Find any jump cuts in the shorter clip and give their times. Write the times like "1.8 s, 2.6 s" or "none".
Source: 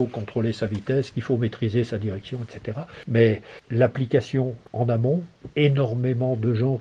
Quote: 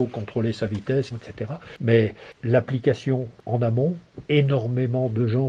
1.1 s